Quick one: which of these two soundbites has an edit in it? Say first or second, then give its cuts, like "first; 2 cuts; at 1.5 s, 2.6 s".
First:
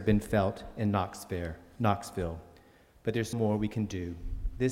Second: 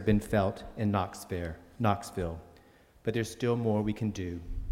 first; 1 cut; at 3.3 s